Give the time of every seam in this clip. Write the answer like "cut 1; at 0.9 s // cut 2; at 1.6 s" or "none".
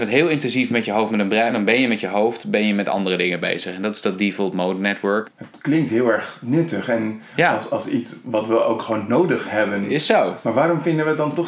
cut 1; at 1.5 s // cut 2; at 5.2 s